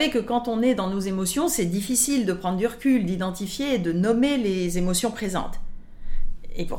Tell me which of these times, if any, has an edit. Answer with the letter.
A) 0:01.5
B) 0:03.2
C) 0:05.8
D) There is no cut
D